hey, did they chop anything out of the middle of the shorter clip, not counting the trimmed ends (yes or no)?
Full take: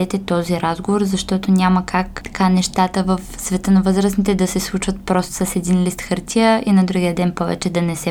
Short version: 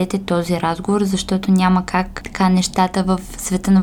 no